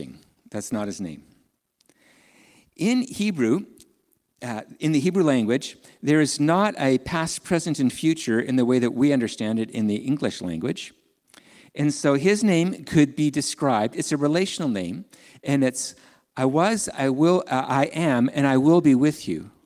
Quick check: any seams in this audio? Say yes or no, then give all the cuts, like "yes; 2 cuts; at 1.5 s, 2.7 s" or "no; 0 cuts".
no; 0 cuts